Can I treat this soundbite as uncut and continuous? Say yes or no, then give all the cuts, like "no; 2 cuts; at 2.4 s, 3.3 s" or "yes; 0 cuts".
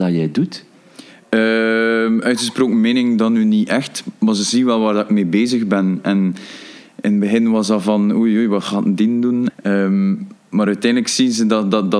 no; 1 cut; at 9.5 s